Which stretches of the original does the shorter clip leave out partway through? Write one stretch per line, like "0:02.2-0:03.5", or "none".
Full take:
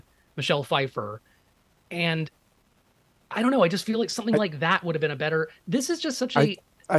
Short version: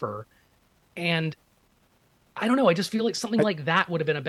none